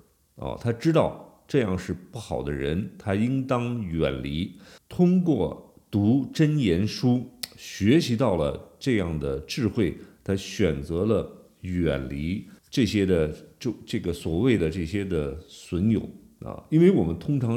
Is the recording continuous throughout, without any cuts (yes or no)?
no